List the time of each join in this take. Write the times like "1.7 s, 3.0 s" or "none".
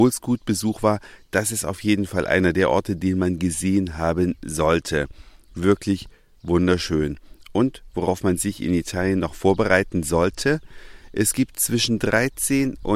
none